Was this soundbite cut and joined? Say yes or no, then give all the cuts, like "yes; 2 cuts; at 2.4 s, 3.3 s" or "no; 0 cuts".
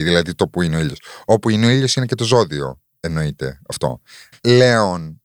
yes; 1 cut; at 4.3 s